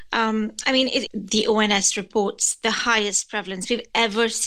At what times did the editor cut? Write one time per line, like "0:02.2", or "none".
0:01.1

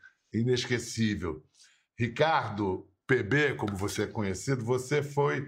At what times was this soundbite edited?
none

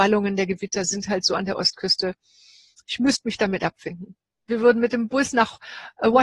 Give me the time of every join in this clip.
0:04.5

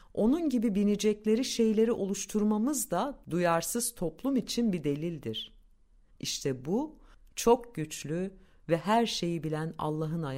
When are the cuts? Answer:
0:06.1

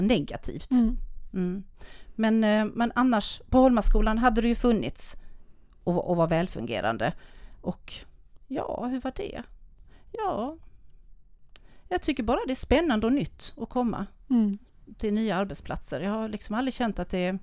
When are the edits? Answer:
none

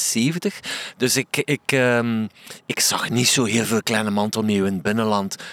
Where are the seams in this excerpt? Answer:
none

